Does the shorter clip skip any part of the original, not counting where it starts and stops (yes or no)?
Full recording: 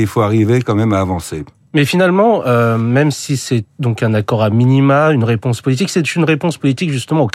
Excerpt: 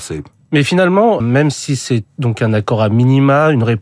yes